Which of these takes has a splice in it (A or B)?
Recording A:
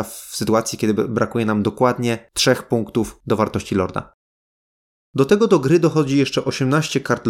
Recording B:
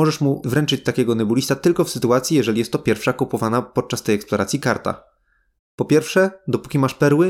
B